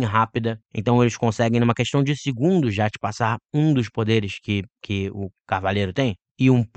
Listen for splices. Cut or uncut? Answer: uncut